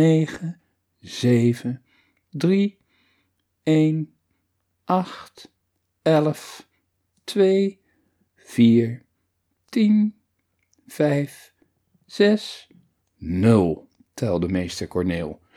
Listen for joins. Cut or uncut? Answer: uncut